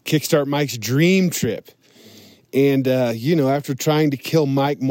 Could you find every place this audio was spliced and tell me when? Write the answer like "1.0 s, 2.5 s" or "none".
none